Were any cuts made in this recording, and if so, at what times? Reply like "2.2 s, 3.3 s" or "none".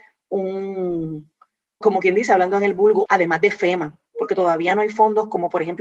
1.8 s, 3.1 s

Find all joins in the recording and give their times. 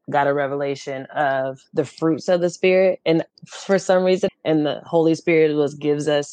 4.3 s

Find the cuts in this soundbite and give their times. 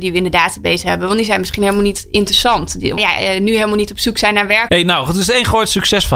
3.0 s, 4.7 s

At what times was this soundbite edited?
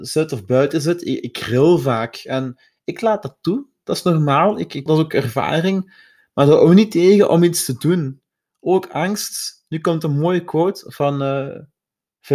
4.9 s

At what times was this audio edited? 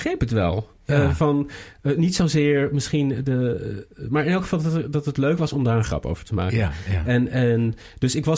none

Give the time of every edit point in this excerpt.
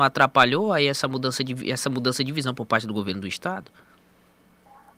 none

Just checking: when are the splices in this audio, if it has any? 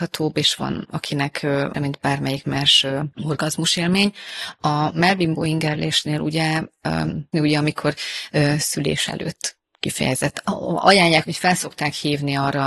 1.7 s, 7.3 s, 11.2 s

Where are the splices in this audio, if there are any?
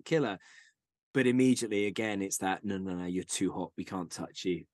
none

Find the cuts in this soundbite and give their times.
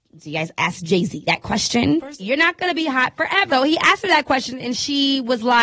2.2 s, 3.5 s

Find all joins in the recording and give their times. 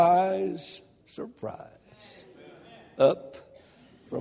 1.0 s

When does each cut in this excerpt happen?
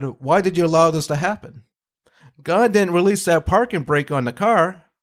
2.2 s

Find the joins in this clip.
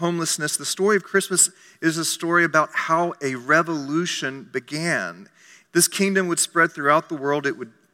5.6 s

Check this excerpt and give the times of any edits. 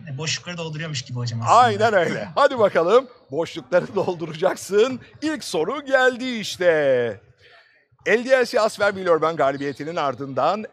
none

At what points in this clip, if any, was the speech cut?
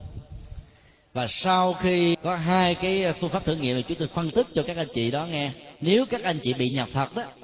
2.1 s, 5.8 s

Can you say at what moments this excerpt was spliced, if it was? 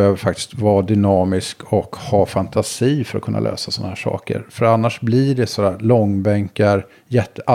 none

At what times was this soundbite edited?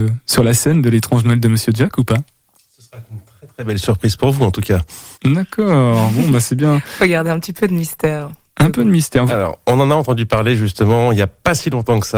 5.1 s, 9.3 s

